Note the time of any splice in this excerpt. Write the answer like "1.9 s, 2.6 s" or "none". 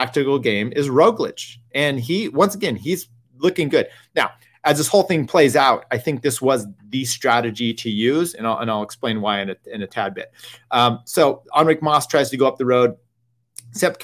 none

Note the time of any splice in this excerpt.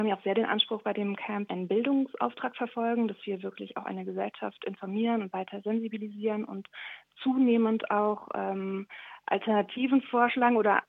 1.5 s

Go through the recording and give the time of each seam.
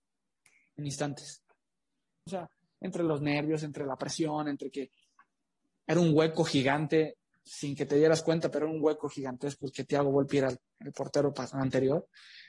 2.3 s

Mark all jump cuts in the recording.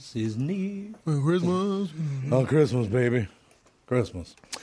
none

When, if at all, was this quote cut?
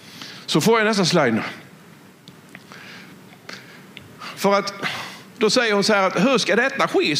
none

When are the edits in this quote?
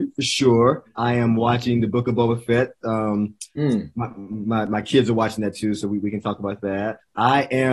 none

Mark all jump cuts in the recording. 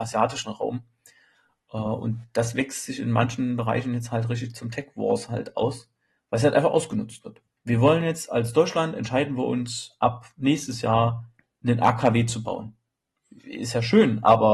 7.6 s

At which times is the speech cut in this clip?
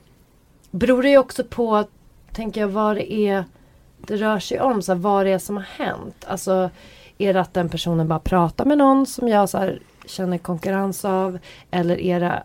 none

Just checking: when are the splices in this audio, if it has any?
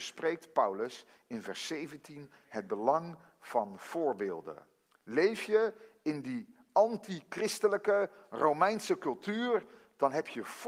none

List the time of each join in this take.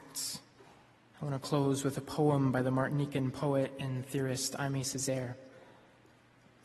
1.1 s

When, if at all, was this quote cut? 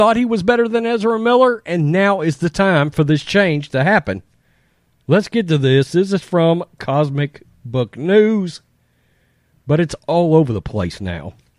none

